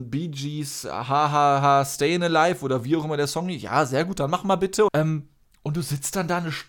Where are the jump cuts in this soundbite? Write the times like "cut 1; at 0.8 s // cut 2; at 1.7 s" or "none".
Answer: cut 1; at 4.9 s